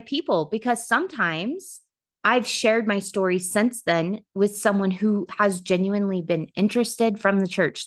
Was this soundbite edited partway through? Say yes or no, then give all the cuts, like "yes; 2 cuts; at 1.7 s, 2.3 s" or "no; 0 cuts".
no; 0 cuts